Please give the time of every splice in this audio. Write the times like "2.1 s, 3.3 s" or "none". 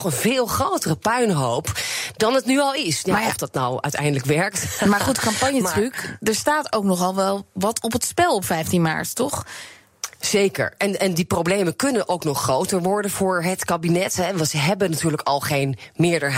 none